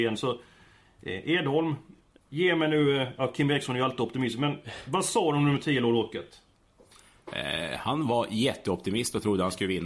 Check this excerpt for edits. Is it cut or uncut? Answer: uncut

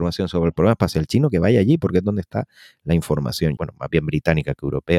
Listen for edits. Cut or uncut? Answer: cut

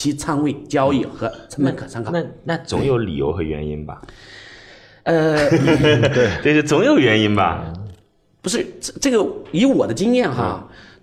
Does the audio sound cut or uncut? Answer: uncut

